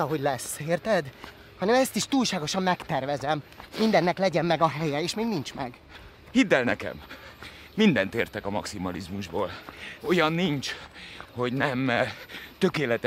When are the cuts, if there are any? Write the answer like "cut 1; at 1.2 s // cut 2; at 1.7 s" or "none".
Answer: cut 1; at 3.7 s // cut 2; at 10.0 s